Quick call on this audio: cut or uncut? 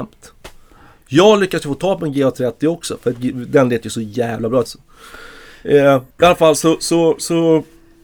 cut